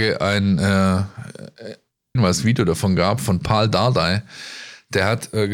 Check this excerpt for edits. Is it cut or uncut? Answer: cut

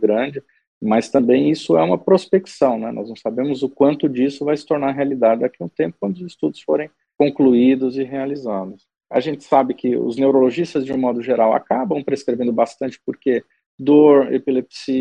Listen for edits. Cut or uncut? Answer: uncut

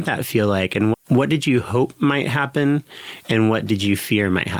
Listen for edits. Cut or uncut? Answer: cut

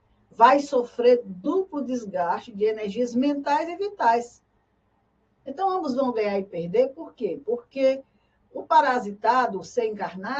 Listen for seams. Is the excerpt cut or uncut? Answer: cut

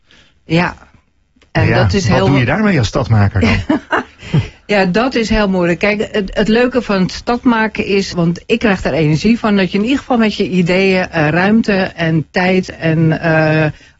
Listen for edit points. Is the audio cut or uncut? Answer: cut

